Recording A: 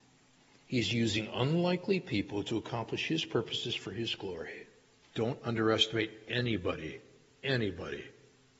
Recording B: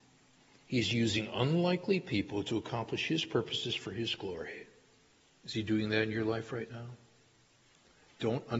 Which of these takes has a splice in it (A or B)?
A